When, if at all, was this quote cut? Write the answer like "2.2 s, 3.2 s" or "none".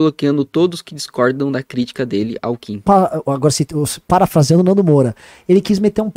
2.8 s